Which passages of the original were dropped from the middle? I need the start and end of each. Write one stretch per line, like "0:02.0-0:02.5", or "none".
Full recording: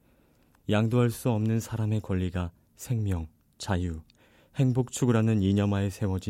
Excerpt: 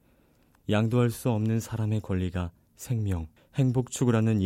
0:03.4-0:04.4

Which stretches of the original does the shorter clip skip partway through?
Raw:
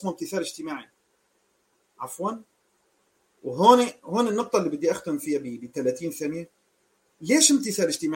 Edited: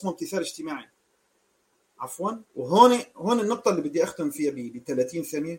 0:02.5-0:03.3

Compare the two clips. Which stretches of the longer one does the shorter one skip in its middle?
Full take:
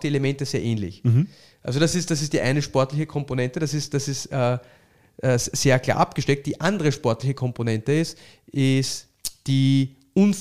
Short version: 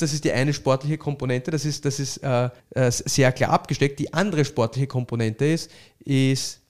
0:04.7-0:05.1

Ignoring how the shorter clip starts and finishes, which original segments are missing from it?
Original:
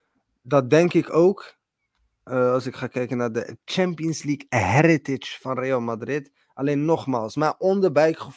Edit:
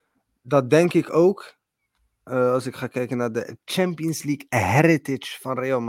none

